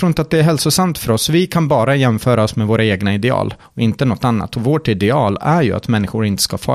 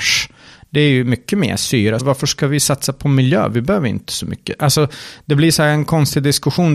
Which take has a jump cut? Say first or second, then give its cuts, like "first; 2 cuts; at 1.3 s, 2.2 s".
second; 1 cut; at 2.0 s